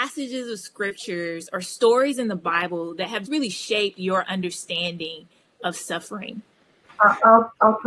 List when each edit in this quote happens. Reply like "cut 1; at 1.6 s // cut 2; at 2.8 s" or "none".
cut 1; at 3.3 s